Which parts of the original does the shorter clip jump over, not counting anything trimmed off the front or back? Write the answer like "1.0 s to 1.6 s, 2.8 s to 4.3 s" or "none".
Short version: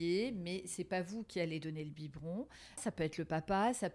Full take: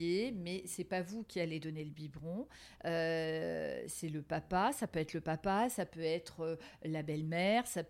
2.8 s to 4.7 s